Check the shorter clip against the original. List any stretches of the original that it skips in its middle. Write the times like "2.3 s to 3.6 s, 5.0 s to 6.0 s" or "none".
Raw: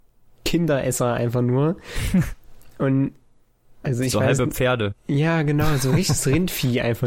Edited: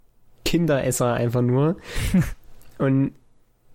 none